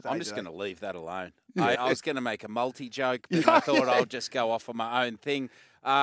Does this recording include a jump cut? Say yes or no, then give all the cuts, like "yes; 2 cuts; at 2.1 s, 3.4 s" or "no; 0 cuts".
yes; 2 cuts; at 1.7 s, 3.4 s